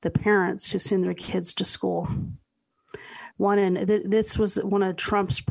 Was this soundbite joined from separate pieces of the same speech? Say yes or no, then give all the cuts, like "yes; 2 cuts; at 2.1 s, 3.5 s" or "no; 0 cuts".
yes; 1 cut; at 3.3 s